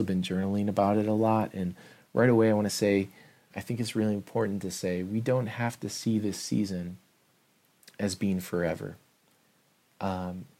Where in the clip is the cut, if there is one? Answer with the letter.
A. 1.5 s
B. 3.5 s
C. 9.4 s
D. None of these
B